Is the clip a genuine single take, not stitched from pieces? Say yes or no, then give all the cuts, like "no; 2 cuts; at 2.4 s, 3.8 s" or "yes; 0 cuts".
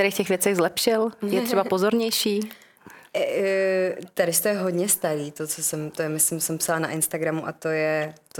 yes; 0 cuts